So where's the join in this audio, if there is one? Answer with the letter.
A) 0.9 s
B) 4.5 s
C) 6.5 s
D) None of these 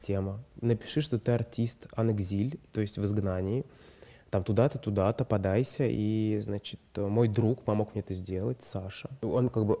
D